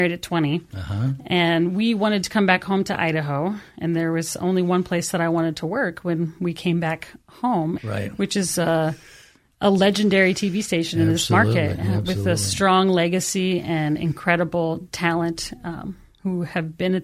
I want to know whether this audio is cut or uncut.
cut